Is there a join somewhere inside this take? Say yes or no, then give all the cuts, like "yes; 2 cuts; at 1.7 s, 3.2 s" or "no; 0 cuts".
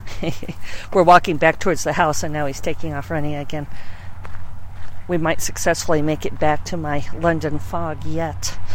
no; 0 cuts